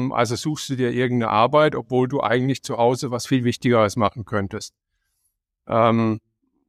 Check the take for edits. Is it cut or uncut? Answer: uncut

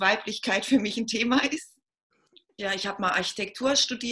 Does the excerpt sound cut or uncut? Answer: cut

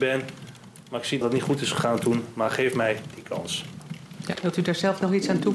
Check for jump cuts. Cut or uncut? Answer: cut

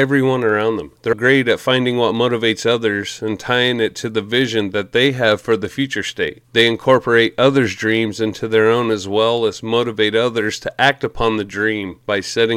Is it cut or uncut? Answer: cut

